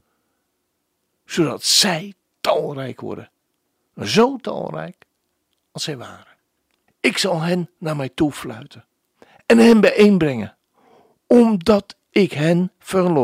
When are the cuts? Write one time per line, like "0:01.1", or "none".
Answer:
0:06.9